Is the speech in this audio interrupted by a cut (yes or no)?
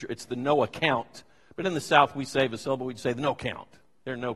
no